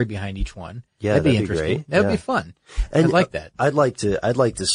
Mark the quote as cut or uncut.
uncut